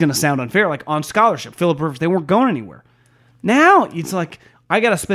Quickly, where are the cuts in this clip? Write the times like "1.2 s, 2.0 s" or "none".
1.5 s